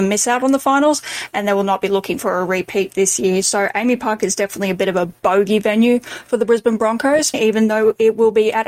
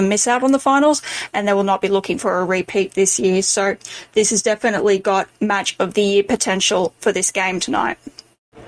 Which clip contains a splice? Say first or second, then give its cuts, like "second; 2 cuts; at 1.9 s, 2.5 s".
first; 2 cuts; at 3.4 s, 7.3 s